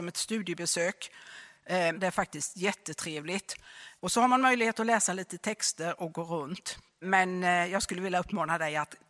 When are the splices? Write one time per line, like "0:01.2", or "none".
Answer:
0:01.9
0:04.0
0:07.0